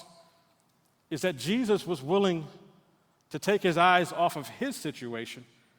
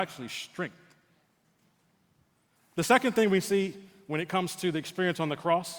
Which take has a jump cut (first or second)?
second